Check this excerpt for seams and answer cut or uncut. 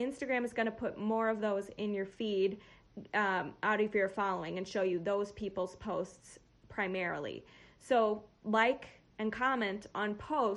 uncut